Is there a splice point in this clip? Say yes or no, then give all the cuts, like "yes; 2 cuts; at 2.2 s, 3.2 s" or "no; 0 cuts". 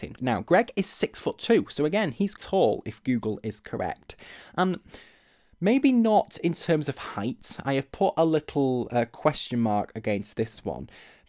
yes; 1 cut; at 2.4 s